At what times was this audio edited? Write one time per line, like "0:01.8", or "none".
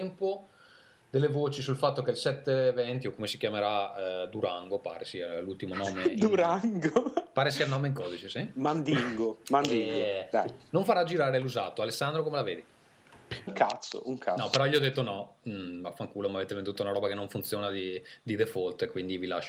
0:13.5